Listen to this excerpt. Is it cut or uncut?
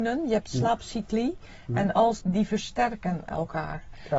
cut